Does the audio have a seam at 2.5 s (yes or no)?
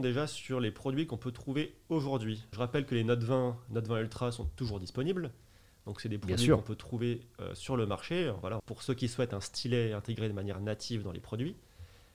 yes